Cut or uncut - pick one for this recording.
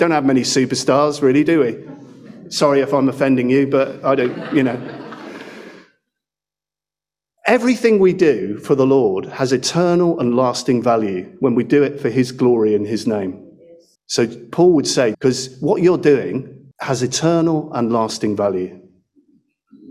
cut